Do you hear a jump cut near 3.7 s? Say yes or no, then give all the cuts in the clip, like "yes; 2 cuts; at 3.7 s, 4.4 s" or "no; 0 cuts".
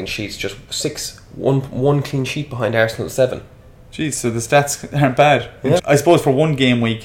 no; 1 cut; at 5.8 s